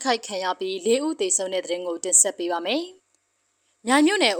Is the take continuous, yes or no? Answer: no